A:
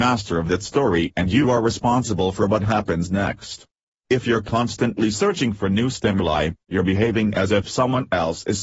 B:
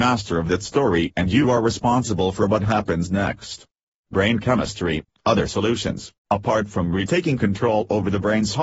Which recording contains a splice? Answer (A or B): B